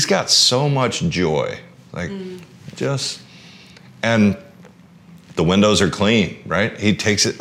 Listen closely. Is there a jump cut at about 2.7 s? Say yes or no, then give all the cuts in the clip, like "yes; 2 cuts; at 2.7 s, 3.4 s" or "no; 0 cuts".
yes; 1 cut; at 2.7 s